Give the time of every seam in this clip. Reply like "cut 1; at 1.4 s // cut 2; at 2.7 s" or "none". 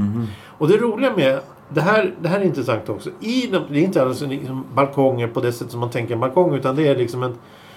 cut 1; at 3.7 s